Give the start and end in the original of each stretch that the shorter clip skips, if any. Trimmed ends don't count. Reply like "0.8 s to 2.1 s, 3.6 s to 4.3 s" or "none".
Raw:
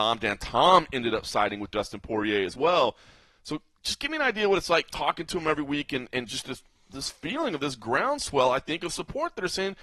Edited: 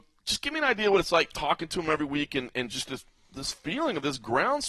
none